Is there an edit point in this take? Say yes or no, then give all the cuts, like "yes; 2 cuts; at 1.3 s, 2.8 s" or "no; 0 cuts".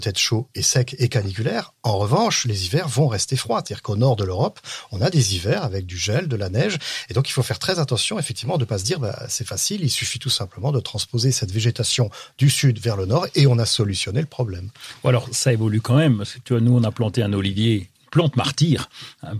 no; 0 cuts